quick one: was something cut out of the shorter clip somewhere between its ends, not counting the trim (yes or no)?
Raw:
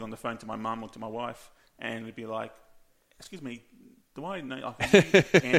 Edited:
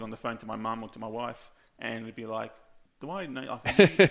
yes